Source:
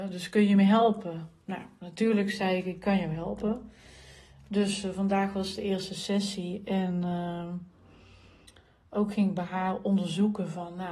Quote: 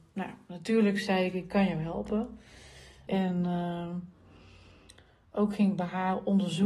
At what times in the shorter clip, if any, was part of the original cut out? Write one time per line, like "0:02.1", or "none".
0:03.1